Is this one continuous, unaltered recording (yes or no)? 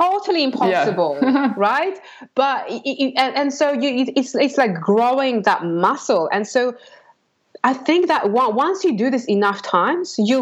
yes